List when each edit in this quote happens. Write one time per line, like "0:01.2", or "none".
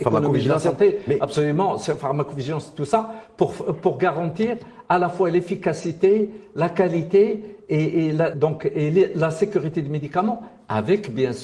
0:08.3

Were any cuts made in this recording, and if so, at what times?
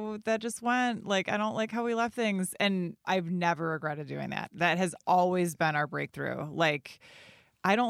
0:03.0

